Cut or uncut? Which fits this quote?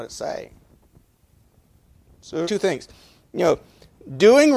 cut